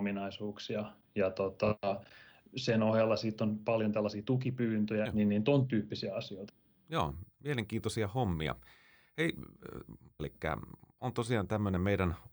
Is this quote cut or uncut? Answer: cut